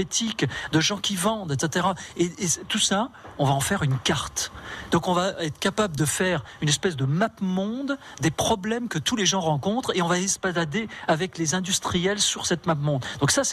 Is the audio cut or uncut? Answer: uncut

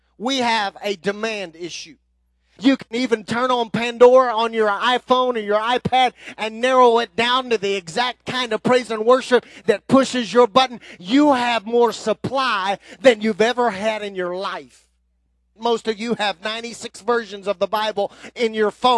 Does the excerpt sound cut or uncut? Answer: cut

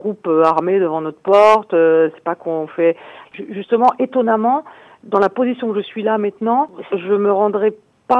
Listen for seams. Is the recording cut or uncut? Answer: cut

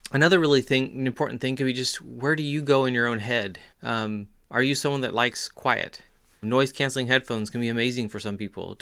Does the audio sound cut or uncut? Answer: cut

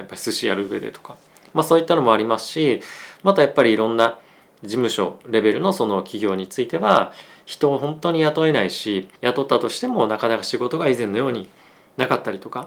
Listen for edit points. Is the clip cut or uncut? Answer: cut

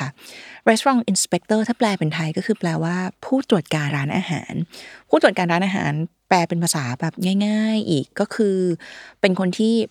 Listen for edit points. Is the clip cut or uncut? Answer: cut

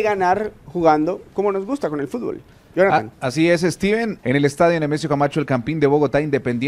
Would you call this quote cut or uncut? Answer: cut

